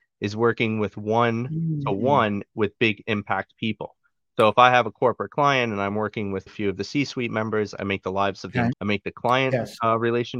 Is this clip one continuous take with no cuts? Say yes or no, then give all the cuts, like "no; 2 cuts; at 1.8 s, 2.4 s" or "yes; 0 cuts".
no; 2 cuts; at 6.5 s, 8.7 s